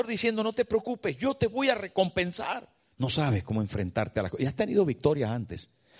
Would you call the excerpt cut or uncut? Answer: cut